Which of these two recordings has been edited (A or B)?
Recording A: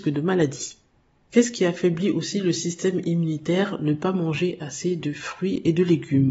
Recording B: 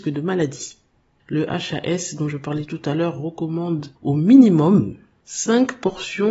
B